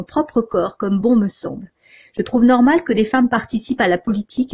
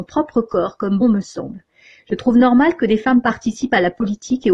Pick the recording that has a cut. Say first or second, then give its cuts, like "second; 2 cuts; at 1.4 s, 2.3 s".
second; 1 cut; at 1.0 s